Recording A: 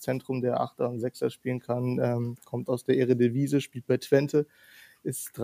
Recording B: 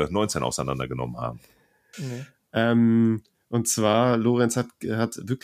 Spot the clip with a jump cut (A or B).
B